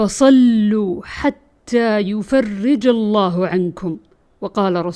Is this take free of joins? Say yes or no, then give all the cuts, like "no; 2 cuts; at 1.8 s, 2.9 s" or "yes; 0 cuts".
yes; 0 cuts